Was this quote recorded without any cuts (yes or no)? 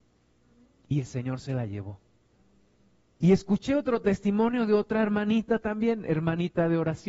no